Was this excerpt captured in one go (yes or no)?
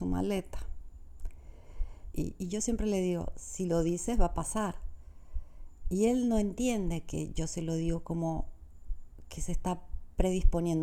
no